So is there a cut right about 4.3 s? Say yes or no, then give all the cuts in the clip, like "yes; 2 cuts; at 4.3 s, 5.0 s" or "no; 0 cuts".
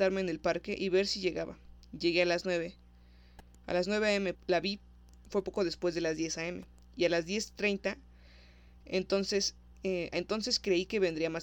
yes; 2 cuts; at 4.3 s, 10.1 s